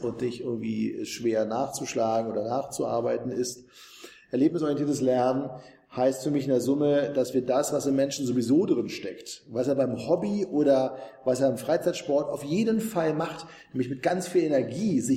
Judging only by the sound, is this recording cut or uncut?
uncut